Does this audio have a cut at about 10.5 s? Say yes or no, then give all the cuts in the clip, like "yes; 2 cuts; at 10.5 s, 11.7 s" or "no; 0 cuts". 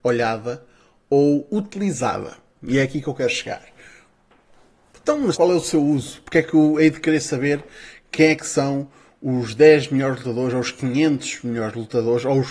no; 1 cut; at 5.3 s